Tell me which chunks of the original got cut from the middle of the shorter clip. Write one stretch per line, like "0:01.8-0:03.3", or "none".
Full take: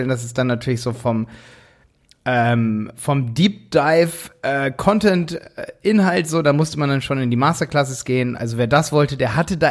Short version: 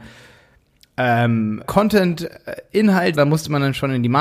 0:02.9-0:04.7
0:06.3-0:06.4